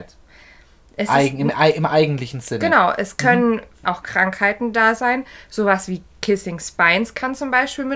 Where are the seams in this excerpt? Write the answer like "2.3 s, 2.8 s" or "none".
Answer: 3.8 s